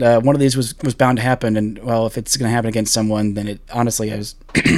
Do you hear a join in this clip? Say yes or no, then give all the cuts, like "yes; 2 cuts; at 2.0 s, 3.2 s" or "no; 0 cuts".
no; 0 cuts